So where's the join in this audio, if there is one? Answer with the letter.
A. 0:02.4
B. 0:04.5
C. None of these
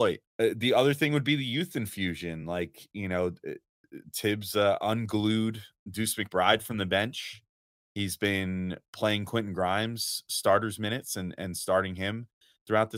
C